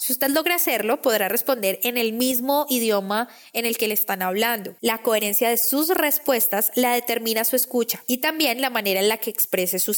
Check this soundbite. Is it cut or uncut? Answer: cut